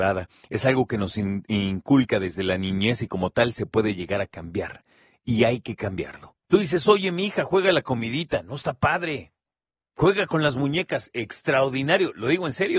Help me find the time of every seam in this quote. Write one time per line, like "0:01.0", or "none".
0:06.4